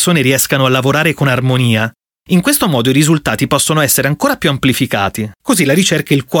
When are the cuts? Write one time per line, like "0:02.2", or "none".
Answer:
0:05.4